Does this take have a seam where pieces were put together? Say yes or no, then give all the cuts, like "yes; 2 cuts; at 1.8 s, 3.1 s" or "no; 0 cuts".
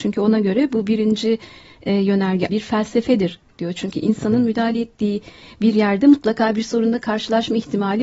yes; 1 cut; at 2.5 s